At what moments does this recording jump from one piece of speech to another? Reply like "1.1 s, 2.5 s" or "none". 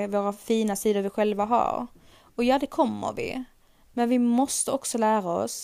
none